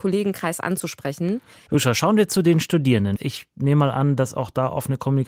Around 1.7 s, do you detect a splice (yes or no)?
yes